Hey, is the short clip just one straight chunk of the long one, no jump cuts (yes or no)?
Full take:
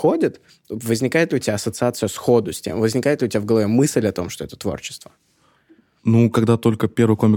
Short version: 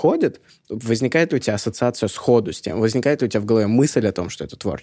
yes